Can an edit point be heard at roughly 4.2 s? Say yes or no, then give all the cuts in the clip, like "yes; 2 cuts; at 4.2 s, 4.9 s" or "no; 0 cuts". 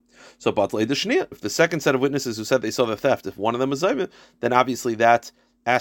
no; 1 cut; at 1.3 s